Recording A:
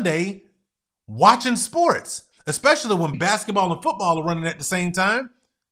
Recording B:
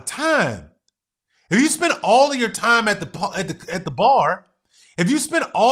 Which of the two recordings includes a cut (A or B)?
A